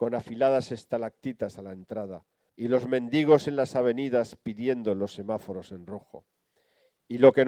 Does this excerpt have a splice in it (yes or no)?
yes